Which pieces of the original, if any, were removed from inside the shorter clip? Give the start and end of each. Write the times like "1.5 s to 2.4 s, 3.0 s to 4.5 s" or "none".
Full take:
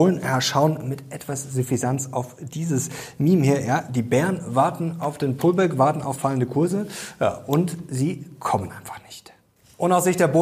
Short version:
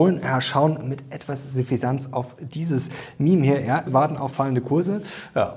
3.9 s to 5.7 s

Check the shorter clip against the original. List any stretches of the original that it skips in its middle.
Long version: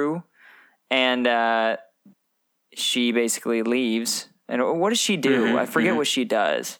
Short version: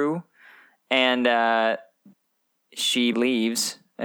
3.1 s to 3.6 s

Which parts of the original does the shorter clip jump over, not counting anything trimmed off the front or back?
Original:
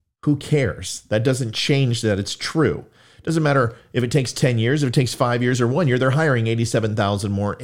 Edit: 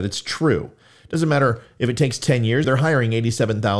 4.8 s to 6.0 s

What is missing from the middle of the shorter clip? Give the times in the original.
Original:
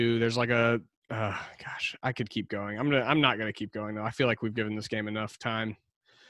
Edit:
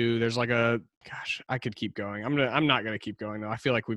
1.0 s to 1.6 s

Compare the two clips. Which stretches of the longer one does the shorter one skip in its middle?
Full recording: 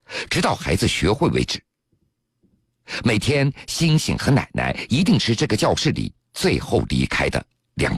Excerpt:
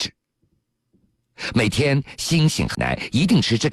4.2 s to 4.5 s

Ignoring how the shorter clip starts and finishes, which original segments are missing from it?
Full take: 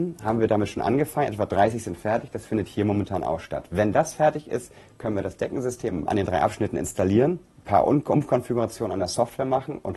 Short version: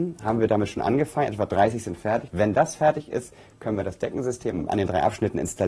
2.3 s to 3.7 s

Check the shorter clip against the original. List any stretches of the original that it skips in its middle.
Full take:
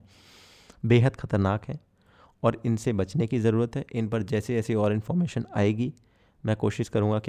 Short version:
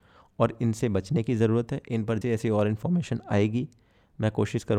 4.3 s to 4.5 s

